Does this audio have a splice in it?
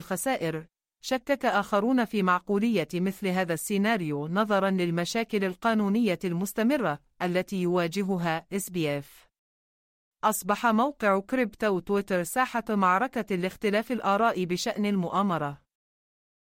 no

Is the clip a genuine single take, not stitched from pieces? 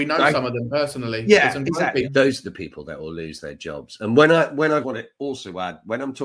no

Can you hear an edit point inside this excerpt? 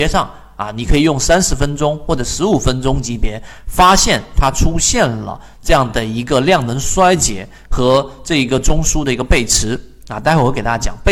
no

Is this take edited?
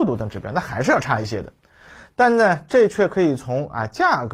no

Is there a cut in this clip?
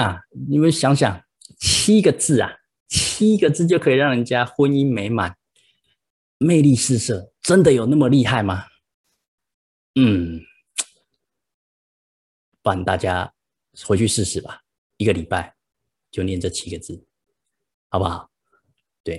no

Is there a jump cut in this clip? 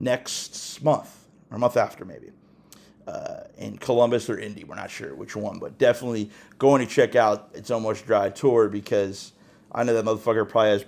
yes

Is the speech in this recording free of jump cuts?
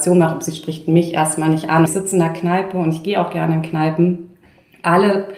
no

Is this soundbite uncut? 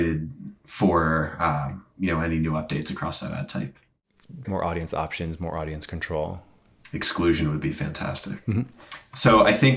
no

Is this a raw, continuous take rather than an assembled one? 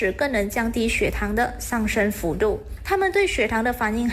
no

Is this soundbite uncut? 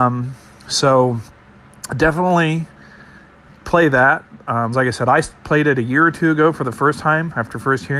no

